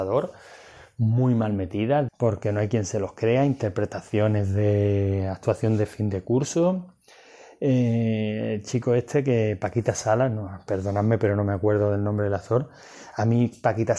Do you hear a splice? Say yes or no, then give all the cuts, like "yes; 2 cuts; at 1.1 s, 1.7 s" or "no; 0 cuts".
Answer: yes; 1 cut; at 2.1 s